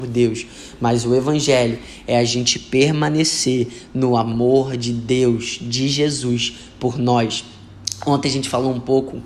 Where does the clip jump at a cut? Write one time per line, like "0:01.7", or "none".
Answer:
none